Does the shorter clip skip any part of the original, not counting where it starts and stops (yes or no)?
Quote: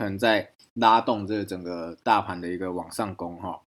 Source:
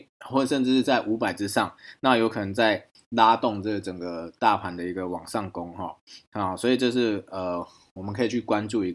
no